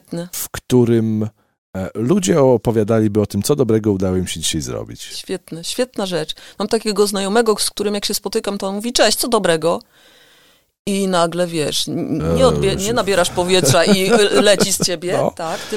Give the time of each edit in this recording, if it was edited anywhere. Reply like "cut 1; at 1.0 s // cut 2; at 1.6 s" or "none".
none